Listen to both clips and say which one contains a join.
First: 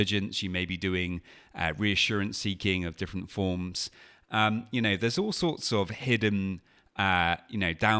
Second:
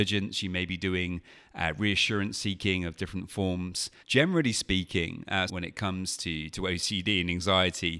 second; 2 cuts; at 4.0 s, 5.5 s

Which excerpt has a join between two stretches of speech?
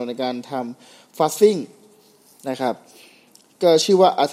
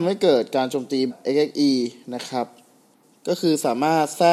second; 1 cut; at 1.1 s

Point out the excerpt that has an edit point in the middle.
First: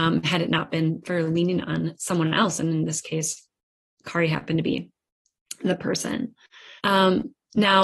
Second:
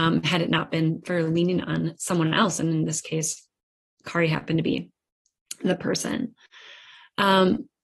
first; 1 cut; at 6.8 s

